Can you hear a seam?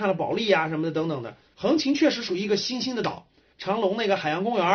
yes; 2 cuts; at 1.5 s, 3.5 s

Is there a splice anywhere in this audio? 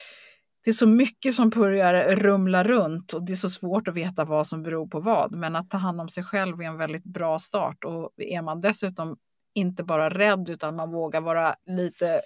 no; 0 cuts

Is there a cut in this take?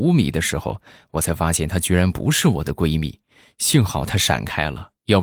no; 0 cuts

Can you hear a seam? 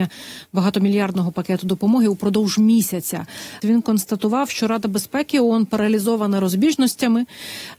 yes; 1 cut; at 3.6 s

